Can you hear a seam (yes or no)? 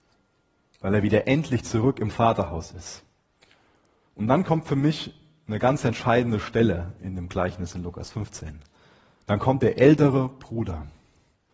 no